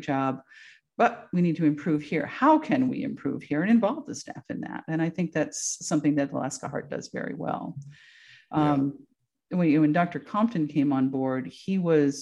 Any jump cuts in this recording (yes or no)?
no